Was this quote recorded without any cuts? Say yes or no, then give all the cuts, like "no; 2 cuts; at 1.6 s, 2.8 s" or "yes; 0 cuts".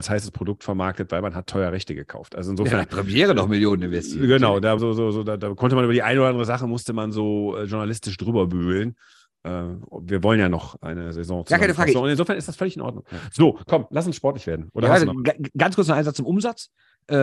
no; 3 cuts; at 4.8 s, 11.9 s, 13.0 s